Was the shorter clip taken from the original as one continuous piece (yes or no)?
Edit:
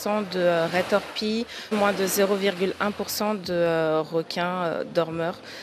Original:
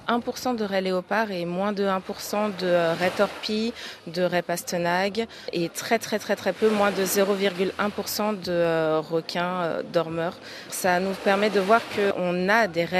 no